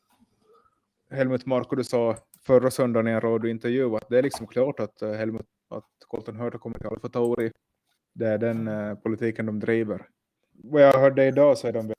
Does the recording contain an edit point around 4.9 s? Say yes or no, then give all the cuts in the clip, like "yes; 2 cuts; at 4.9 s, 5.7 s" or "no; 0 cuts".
no; 2 cuts; at 8.0 s, 10.6 s